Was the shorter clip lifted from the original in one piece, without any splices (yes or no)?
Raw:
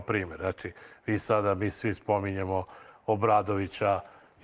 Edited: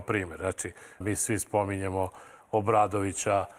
no